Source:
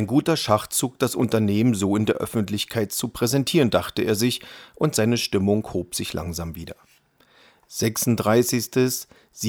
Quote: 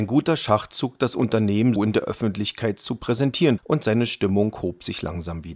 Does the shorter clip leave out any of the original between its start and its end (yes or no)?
yes